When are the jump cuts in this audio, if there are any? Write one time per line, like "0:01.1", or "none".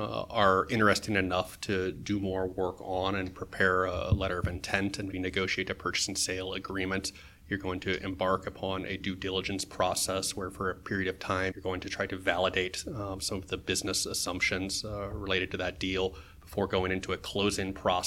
0:05.1
0:11.5